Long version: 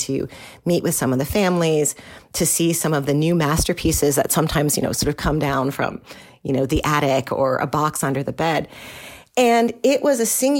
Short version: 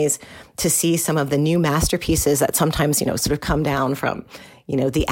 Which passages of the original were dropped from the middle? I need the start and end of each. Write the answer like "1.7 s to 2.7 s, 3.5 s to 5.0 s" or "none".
none